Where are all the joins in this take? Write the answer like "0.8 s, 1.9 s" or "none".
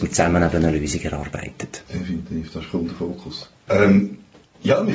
3.7 s